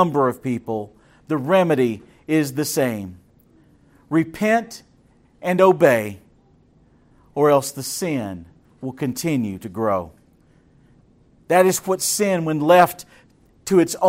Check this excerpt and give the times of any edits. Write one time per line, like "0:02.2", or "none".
none